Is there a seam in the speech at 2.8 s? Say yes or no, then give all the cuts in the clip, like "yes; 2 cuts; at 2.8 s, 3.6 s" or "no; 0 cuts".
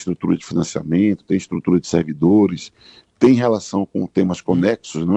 no; 0 cuts